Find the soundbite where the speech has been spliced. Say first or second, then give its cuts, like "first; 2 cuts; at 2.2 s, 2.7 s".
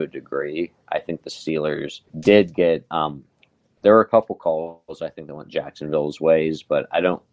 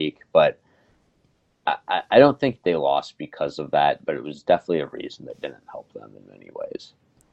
first; 1 cut; at 2.1 s